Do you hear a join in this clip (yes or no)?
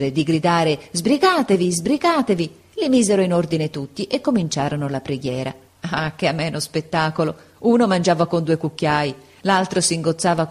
yes